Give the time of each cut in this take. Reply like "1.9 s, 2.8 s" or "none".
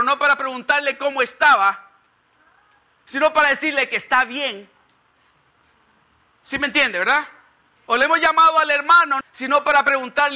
9.2 s